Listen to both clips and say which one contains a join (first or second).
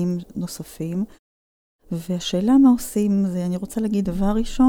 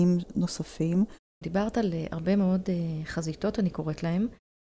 second